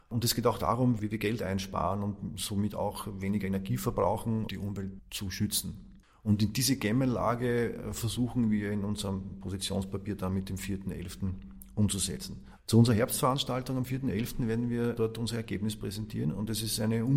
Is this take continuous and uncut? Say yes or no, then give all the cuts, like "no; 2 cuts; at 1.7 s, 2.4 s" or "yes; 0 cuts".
no; 2 cuts; at 4.5 s, 12.6 s